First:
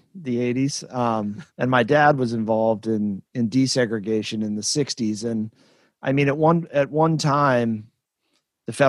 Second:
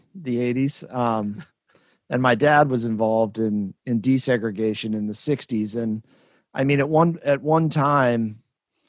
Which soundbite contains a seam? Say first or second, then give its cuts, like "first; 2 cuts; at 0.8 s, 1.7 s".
first; 1 cut; at 1.5 s